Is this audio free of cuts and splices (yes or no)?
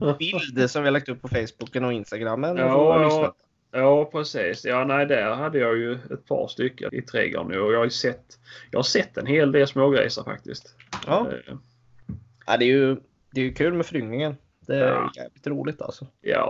no